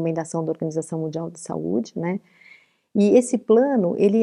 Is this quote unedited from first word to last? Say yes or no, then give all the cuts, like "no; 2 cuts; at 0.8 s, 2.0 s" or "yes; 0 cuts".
yes; 0 cuts